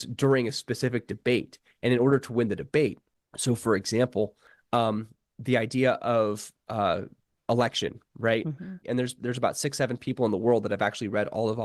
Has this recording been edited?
yes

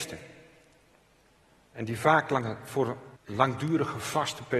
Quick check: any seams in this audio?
yes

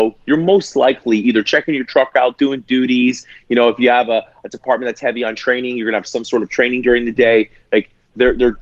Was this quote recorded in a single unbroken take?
yes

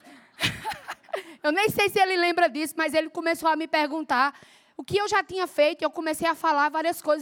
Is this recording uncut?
yes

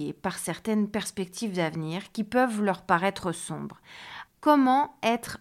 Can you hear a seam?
yes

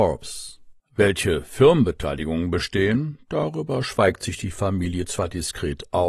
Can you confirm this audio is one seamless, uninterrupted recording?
yes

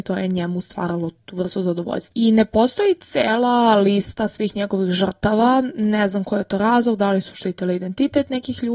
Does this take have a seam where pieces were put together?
yes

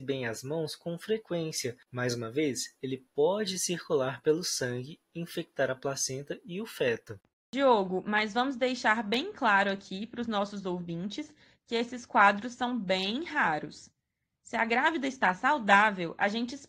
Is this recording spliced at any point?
yes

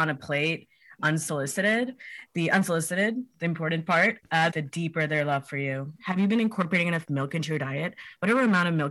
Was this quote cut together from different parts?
yes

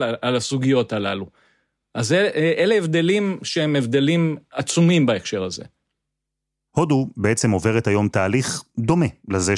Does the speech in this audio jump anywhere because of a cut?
no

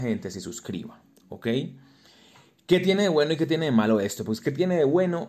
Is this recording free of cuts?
yes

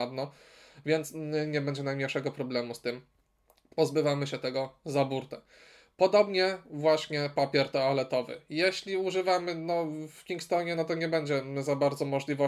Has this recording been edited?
no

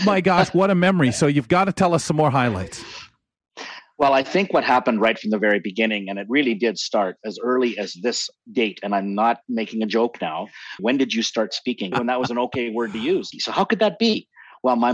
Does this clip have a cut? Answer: yes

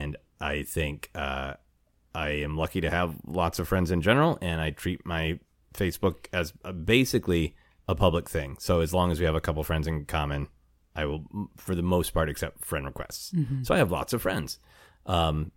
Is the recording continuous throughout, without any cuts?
yes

